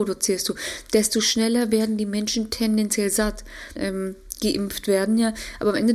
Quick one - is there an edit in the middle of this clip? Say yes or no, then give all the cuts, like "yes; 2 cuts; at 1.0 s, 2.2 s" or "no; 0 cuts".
yes; 1 cut; at 3.8 s